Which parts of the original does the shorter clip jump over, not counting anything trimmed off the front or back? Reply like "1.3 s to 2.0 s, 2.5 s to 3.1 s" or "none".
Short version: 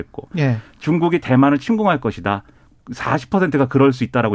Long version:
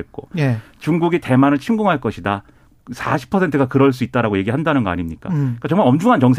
none